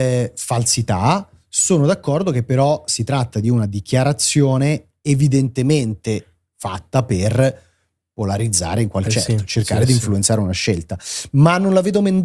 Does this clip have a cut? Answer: yes; 1 cut; at 9.1 s

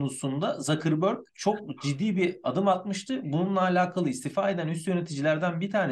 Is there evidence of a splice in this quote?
yes; 1 cut; at 1.3 s

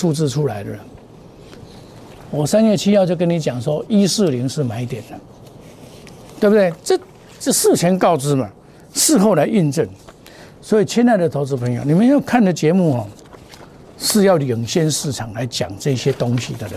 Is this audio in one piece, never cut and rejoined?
yes; 0 cuts

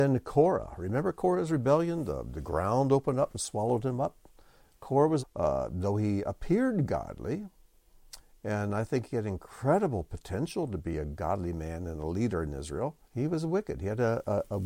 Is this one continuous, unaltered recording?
no; 2 cuts; at 5.2 s, 13.0 s

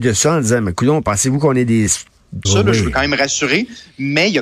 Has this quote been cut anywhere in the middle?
yes; 1 cut; at 2.4 s

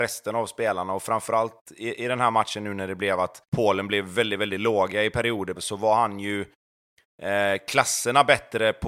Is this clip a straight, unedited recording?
no; 2 cuts; at 3.5 s, 5.6 s

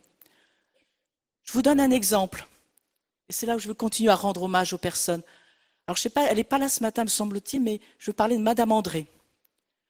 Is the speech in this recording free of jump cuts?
yes; 0 cuts

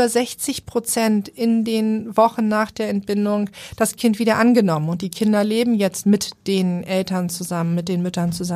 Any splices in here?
no; 0 cuts

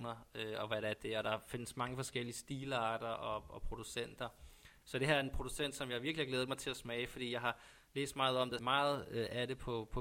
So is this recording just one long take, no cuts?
no; 2 cuts; at 4.8 s, 8.6 s

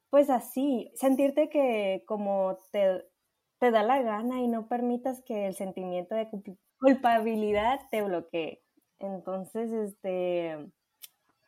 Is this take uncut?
no; 1 cut; at 0.9 s

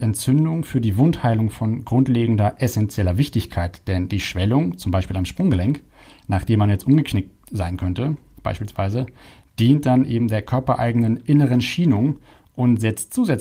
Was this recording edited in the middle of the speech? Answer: no; 0 cuts

